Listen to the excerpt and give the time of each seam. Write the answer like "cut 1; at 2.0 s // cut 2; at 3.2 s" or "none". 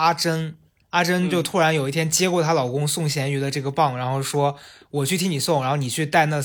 none